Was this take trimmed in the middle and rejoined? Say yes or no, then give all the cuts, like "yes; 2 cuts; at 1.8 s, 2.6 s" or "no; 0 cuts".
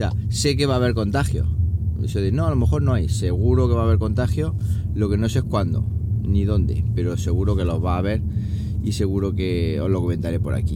no; 0 cuts